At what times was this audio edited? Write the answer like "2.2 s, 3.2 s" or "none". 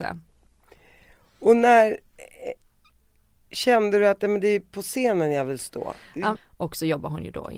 6.3 s